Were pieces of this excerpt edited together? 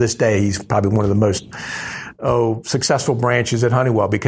no; 0 cuts

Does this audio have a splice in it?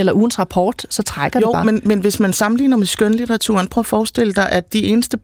no; 0 cuts

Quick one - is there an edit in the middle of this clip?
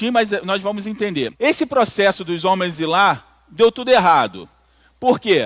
yes; 1 cut; at 1.3 s

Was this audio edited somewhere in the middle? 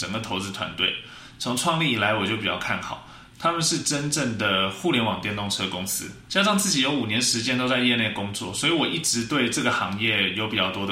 yes; 1 cut; at 6.3 s

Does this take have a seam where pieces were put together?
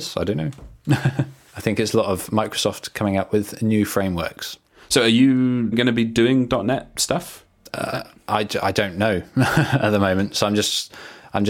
yes; 1 cut; at 5.7 s

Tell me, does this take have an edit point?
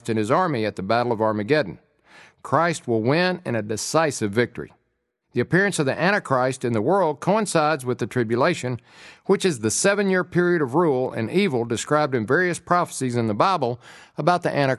no; 0 cuts

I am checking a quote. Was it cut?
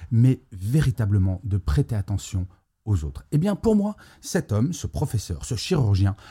no; 0 cuts

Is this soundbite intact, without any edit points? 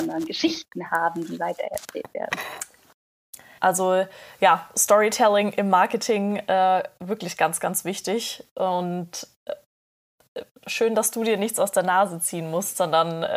no; 1 cut; at 3.6 s

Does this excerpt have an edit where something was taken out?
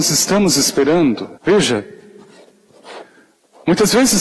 yes; 1 cut; at 1.4 s

